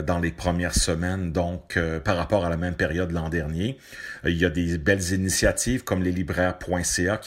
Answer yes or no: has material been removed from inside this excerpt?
no